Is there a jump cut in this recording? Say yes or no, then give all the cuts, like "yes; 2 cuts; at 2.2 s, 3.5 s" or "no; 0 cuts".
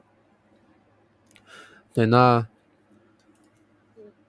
no; 0 cuts